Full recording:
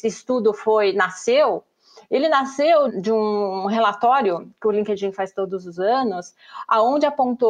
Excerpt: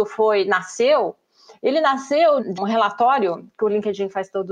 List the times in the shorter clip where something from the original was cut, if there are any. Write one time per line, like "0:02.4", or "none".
0:02.6